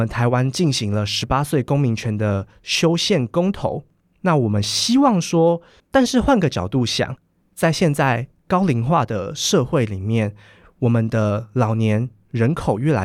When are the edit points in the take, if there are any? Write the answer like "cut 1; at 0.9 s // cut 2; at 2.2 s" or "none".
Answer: cut 1; at 5.8 s